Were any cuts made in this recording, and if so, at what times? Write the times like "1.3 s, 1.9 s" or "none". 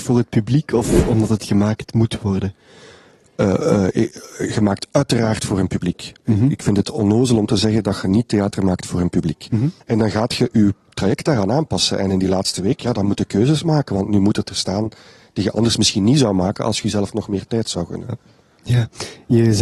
9.8 s